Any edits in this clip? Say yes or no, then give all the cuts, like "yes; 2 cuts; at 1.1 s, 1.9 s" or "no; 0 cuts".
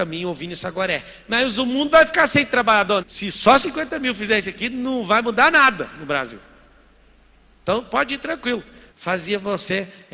yes; 2 cuts; at 3.0 s, 8.9 s